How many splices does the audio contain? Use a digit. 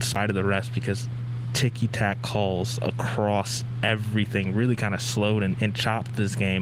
1